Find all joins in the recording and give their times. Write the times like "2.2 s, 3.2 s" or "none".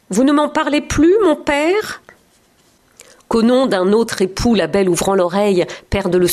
none